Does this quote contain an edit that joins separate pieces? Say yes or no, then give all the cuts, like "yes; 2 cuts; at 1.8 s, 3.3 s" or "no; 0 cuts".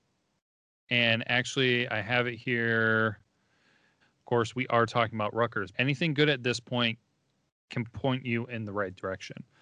yes; 2 cuts; at 4.0 s, 5.7 s